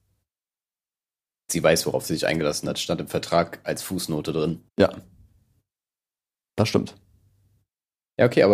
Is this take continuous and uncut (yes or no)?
no